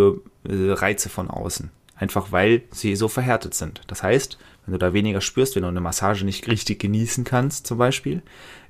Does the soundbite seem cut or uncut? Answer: uncut